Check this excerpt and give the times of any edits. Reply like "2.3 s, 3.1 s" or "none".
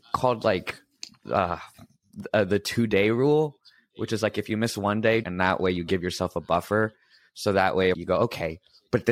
5.2 s, 7.9 s